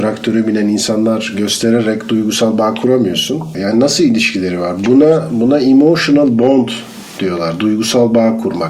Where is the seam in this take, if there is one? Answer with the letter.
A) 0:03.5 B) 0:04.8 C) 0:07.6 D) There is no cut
A